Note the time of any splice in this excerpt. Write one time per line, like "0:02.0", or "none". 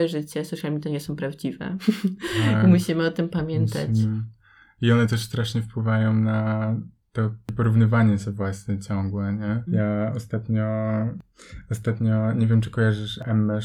0:09.7